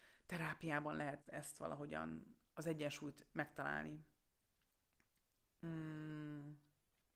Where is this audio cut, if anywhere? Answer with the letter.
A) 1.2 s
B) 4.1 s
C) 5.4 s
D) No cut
A